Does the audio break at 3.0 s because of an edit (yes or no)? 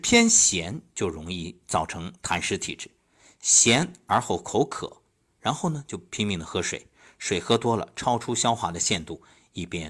no